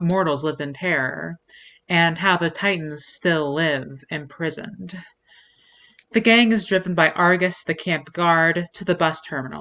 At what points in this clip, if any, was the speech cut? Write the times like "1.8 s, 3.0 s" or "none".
none